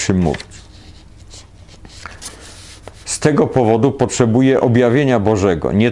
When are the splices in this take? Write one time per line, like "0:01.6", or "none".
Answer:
0:03.0